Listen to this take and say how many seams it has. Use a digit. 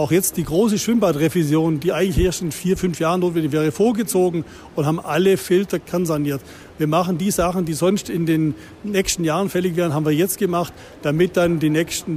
0